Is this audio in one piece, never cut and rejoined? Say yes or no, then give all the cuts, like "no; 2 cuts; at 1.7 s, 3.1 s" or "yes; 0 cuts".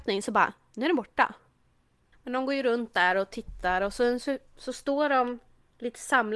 no; 1 cut; at 2.1 s